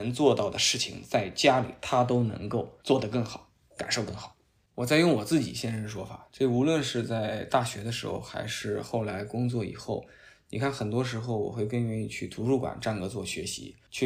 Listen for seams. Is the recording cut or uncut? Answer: uncut